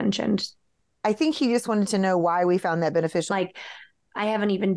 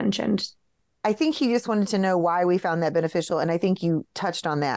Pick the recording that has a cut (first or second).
first